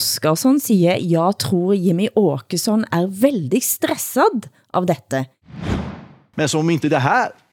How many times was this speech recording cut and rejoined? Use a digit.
0